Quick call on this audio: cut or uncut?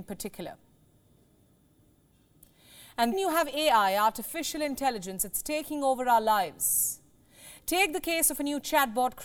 cut